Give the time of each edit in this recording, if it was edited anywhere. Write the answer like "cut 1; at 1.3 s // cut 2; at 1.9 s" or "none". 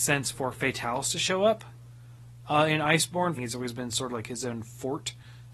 cut 1; at 3.4 s